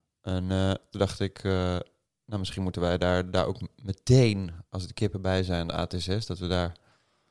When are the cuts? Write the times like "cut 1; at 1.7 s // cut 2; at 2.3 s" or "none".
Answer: none

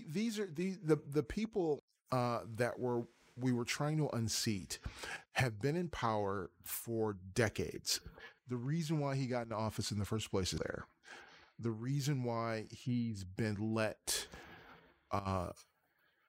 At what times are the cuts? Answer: cut 1; at 8.4 s // cut 2; at 10.6 s

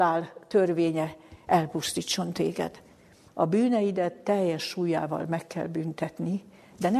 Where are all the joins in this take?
cut 1; at 3.3 s

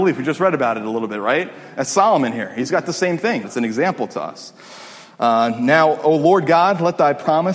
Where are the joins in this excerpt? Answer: cut 1; at 3.4 s

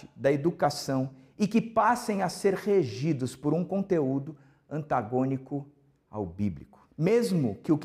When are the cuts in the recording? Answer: cut 1; at 6.9 s

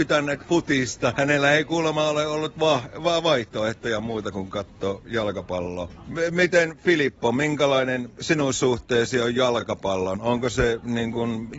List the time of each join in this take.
cut 1; at 1.1 s

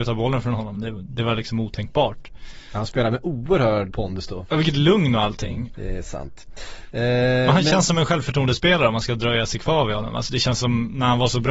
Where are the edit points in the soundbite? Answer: cut 1; at 3.9 s // cut 2; at 5.7 s

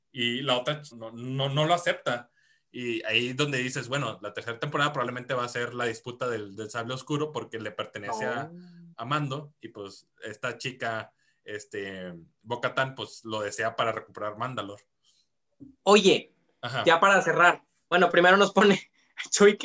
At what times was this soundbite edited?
cut 1; at 0.9 s

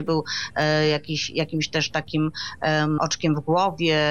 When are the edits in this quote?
cut 1; at 3.0 s

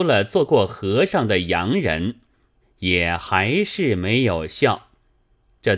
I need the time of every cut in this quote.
cut 1; at 2.6 s

